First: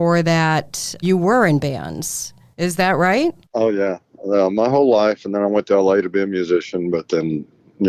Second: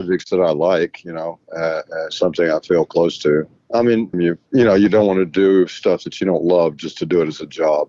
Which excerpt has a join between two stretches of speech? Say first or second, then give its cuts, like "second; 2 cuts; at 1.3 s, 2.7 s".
second; 1 cut; at 4.1 s